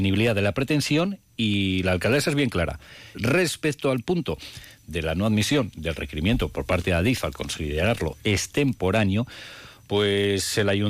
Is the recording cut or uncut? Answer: cut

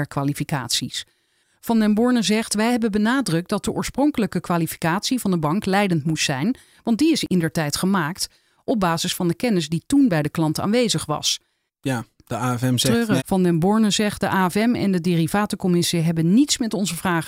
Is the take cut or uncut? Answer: cut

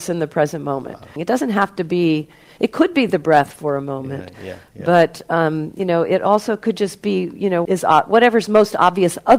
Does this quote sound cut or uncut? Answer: cut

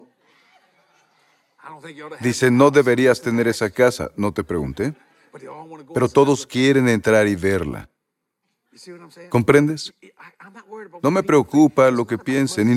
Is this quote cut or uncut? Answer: uncut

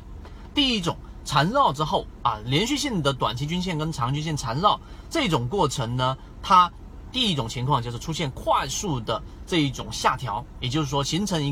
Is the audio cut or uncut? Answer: uncut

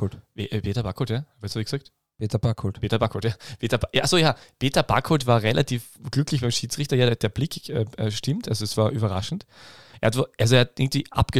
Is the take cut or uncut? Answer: uncut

